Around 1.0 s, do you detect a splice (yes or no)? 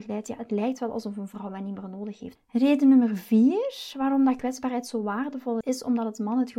no